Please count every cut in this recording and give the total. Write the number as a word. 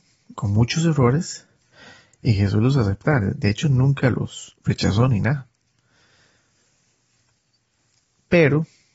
zero